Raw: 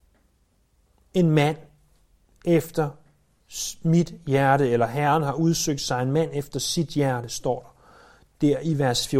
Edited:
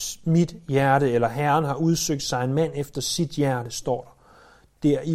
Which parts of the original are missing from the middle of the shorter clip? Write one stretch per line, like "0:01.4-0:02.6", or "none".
none